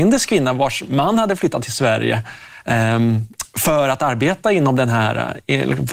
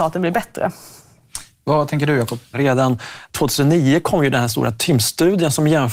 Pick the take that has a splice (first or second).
second